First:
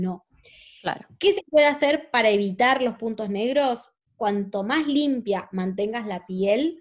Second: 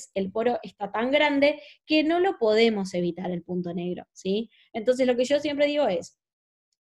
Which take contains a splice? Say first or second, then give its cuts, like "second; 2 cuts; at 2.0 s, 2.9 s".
first; 1 cut; at 4.1 s